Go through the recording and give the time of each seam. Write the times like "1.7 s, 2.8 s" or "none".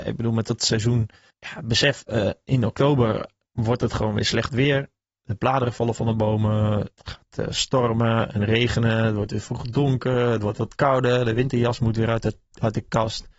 none